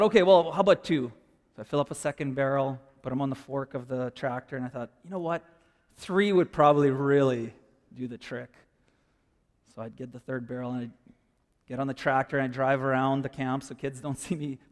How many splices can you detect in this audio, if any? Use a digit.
0